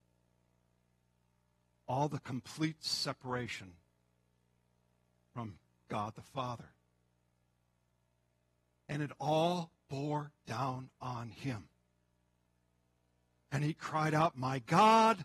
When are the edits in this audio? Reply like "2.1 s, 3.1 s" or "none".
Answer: none